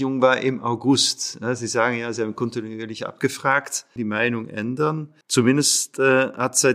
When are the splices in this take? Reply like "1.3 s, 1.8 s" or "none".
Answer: 4.0 s, 5.2 s